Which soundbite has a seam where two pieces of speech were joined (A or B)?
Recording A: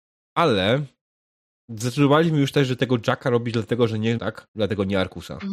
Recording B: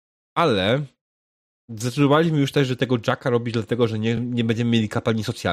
A